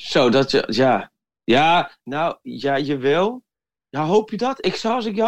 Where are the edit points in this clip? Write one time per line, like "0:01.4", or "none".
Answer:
none

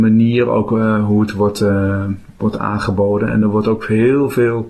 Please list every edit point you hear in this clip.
none

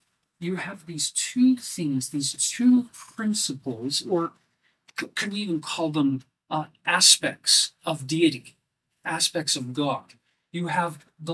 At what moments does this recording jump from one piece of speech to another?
none

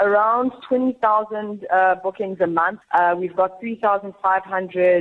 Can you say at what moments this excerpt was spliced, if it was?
0:02.8

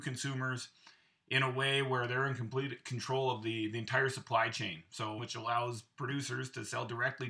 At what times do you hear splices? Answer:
0:05.2

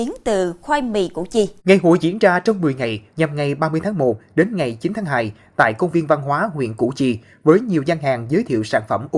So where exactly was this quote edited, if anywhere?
0:01.6
0:03.1

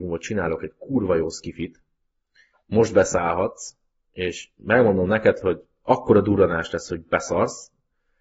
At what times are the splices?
none

